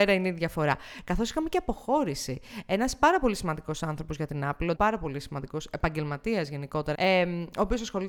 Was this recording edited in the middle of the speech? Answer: yes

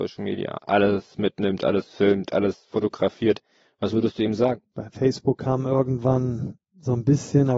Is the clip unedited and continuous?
no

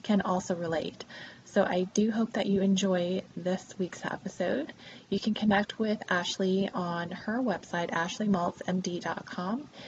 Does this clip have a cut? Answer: no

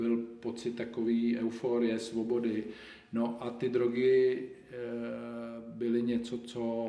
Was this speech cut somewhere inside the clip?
no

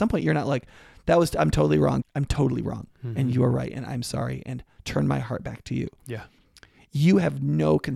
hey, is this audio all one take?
no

